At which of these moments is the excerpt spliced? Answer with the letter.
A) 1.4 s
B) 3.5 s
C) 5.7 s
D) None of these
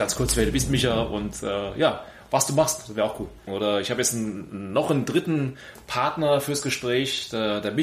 B